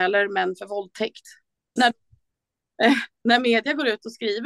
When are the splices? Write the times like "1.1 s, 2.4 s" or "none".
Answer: 1.8 s